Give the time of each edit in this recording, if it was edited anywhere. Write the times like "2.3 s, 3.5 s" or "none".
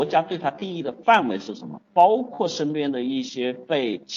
1.9 s